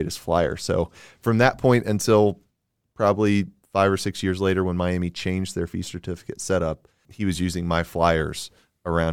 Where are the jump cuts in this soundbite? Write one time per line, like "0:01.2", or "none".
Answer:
0:07.0